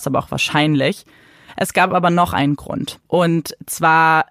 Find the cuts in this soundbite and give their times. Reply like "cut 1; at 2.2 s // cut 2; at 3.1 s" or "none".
cut 1; at 3.1 s